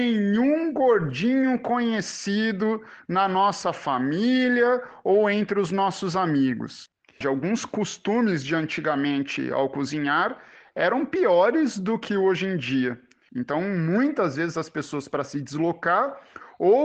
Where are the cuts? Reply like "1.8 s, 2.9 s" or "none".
7.2 s, 13.3 s